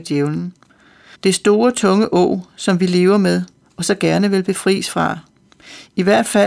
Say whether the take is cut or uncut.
cut